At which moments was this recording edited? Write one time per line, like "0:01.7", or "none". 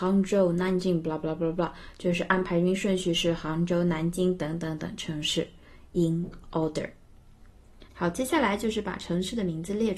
0:07.9